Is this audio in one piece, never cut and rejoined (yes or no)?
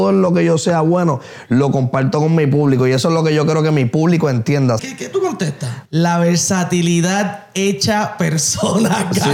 no